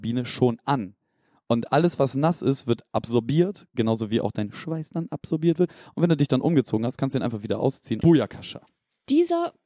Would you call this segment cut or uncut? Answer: cut